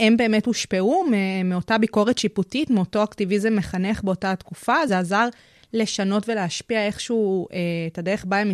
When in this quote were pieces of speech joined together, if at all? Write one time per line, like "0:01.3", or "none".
none